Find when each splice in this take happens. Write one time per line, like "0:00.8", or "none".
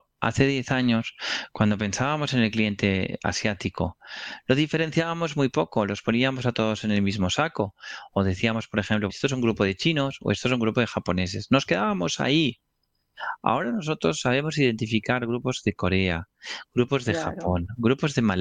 0:09.1